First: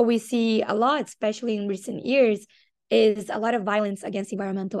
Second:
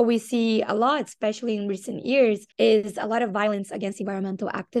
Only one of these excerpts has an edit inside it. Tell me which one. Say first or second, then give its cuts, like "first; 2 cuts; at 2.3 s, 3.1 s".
second; 1 cut; at 2.5 s